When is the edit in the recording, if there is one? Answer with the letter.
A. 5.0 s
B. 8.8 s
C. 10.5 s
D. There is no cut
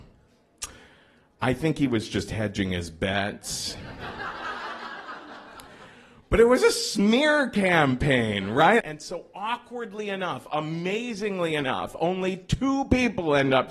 B